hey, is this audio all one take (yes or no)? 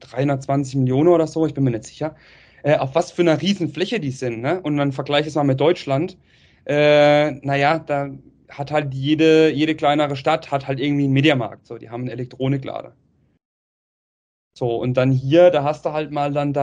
yes